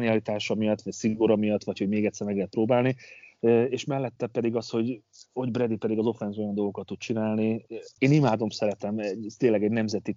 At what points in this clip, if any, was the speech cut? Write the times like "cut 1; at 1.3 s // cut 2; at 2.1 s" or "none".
cut 1; at 8.0 s